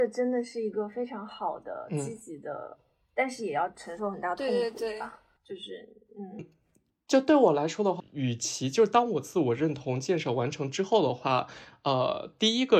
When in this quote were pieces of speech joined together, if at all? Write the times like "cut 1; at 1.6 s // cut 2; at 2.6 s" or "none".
cut 1; at 6.4 s // cut 2; at 8.0 s